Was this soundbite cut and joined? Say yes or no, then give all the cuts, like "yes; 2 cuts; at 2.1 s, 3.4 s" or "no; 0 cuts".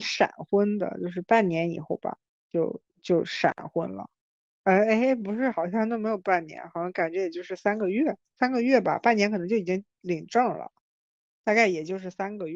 no; 0 cuts